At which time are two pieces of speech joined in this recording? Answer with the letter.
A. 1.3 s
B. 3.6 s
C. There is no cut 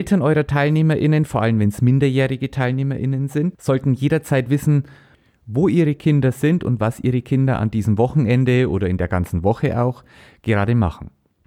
C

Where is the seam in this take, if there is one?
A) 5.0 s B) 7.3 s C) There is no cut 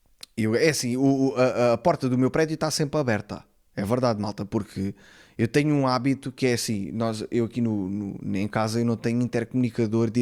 C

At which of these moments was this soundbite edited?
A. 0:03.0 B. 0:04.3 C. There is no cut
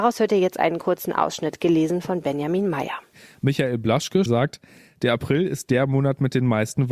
B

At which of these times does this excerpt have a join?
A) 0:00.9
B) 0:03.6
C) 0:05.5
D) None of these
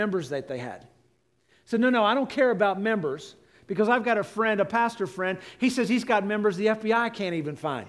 D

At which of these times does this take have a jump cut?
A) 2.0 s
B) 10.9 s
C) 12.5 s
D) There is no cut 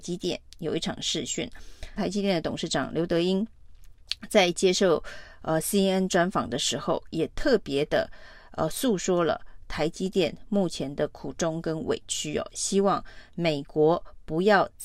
A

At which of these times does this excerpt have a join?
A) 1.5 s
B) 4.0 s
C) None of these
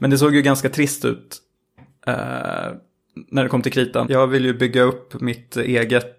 B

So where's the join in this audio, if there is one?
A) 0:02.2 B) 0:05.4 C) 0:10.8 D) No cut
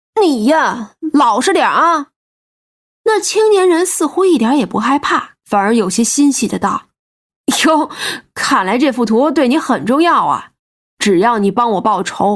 A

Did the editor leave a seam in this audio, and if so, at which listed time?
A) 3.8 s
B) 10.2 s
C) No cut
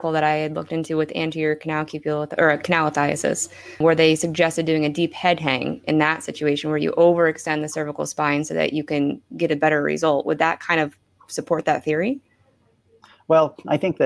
A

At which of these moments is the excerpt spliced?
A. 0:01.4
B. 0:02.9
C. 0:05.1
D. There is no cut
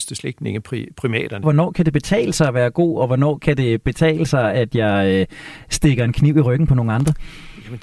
A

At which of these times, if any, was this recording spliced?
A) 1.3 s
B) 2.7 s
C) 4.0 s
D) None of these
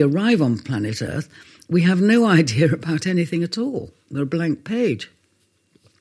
D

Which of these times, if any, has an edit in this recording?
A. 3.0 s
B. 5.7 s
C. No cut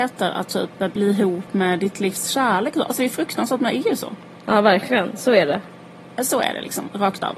C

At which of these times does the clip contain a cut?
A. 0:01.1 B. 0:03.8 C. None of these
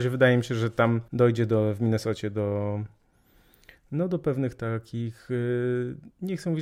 A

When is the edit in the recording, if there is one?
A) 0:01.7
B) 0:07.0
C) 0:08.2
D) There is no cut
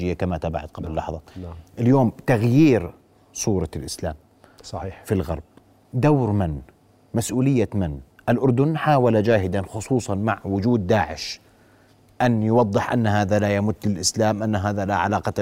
A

